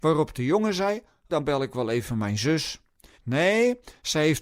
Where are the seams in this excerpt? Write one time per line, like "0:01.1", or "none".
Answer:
0:01.3
0:03.1